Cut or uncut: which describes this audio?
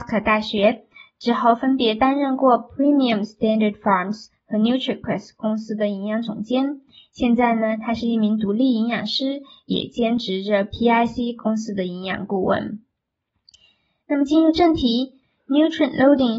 uncut